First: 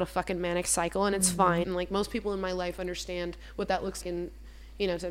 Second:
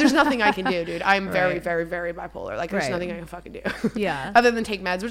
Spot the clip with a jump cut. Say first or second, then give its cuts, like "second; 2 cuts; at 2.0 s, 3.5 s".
first; 2 cuts; at 1.6 s, 4.0 s